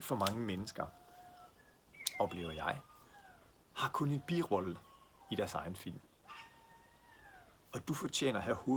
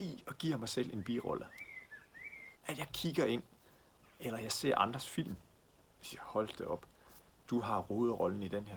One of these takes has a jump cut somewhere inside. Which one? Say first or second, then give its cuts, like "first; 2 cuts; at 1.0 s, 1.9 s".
second; 1 cut; at 2.6 s